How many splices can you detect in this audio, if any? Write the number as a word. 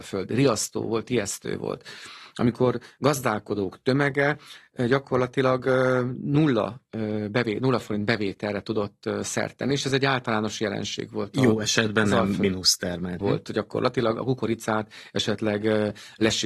one